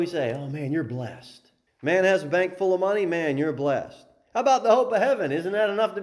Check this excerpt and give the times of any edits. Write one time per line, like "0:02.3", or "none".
0:01.7

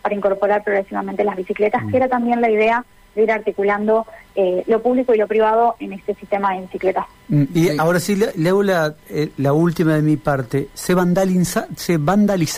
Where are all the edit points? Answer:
none

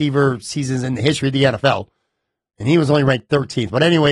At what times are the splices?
none

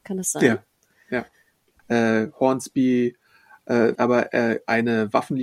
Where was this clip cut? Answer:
0:01.8
0:04.0

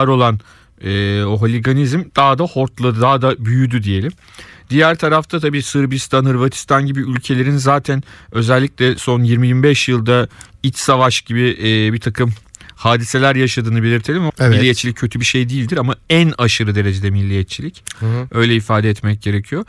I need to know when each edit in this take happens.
0:14.3
0:17.9

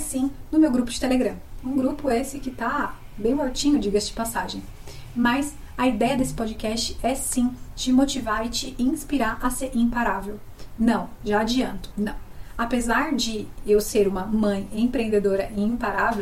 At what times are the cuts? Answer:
0:11.9

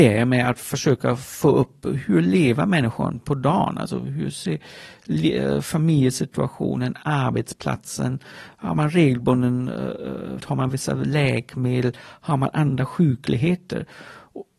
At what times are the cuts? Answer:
0:10.4

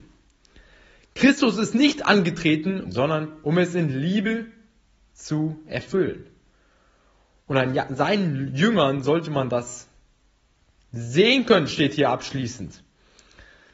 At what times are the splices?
0:02.8

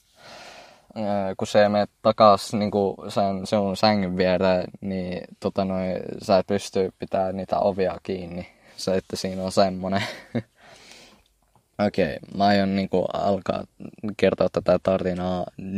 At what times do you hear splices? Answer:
none

